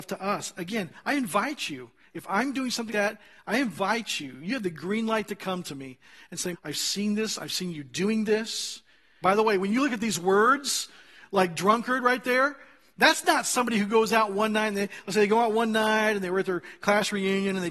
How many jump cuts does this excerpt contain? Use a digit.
3